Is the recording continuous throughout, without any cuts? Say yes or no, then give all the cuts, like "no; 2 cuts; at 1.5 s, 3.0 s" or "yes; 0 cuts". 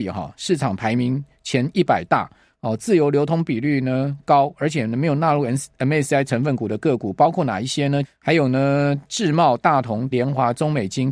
no; 2 cuts; at 8.0 s, 10.1 s